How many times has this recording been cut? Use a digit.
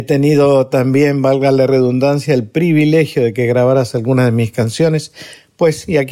0